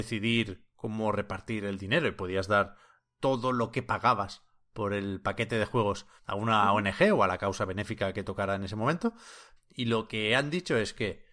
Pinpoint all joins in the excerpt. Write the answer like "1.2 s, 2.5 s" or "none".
9.6 s